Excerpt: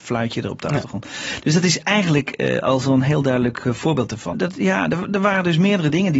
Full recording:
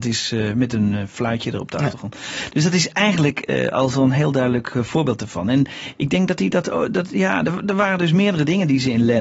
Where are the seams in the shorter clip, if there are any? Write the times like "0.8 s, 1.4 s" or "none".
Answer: 4.3 s